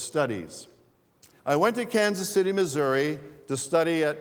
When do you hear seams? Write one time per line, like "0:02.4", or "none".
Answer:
0:01.4